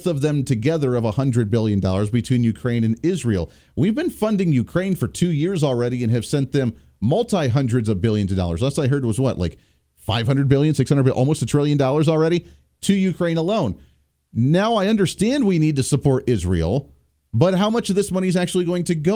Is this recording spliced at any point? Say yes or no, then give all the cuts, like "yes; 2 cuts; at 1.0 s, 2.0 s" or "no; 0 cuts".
no; 0 cuts